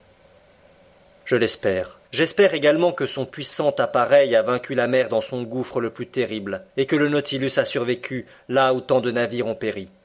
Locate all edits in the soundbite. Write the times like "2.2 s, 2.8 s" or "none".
2.0 s, 6.7 s